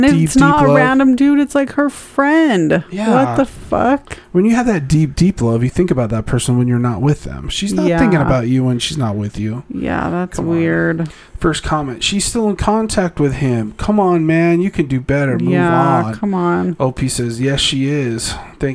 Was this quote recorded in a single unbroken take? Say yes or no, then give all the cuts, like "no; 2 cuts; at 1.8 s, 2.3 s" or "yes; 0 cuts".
yes; 0 cuts